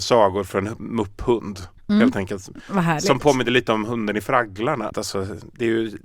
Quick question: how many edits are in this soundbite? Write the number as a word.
one